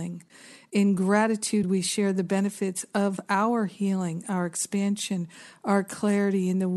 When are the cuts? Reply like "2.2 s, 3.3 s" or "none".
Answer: none